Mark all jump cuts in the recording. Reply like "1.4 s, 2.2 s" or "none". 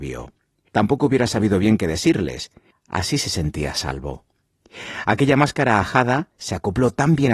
2.7 s